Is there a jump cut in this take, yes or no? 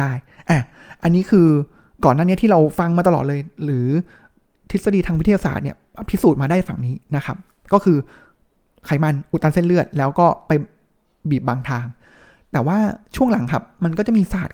no